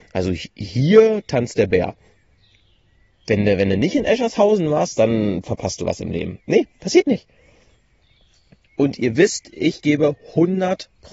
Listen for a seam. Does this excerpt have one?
no; 0 cuts

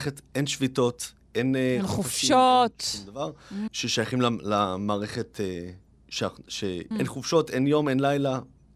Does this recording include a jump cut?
yes; 2 cuts; at 3.7 s, 6.9 s

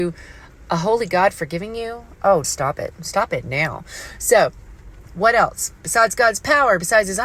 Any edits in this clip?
yes; 1 cut; at 2.4 s

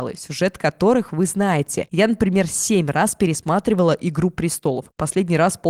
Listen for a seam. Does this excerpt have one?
no; 0 cuts

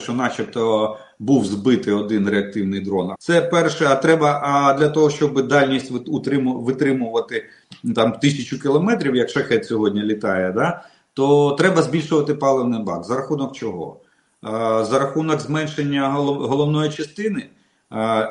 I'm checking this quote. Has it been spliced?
yes; 1 cut; at 3.1 s

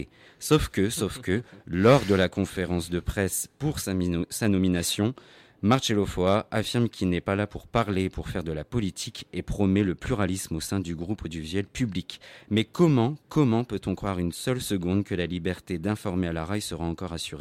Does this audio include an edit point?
no; 0 cuts

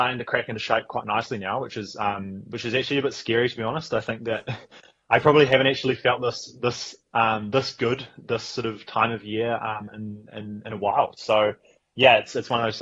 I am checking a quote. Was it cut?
no; 0 cuts

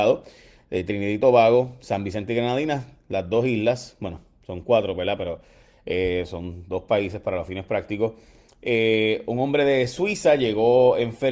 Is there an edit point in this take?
no; 0 cuts

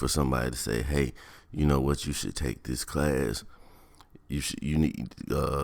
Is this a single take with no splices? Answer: yes; 0 cuts

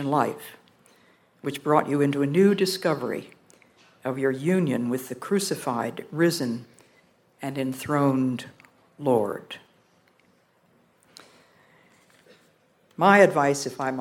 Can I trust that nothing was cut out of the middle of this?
yes; 0 cuts

